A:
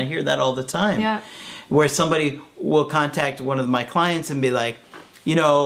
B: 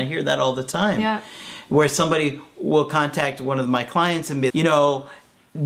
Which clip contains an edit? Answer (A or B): B